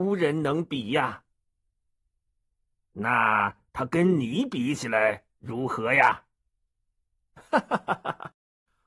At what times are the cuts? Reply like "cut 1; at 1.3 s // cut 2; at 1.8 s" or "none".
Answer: none